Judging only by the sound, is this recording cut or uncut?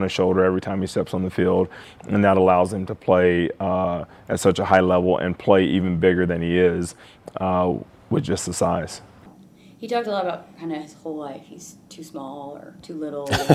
uncut